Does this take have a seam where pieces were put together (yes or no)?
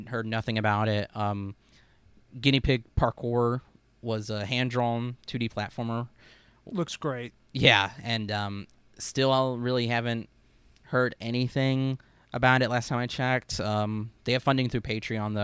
no